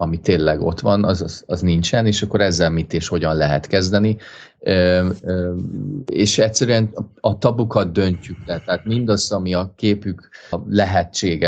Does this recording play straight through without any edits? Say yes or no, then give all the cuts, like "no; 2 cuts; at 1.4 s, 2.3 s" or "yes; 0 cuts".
no; 1 cut; at 10.5 s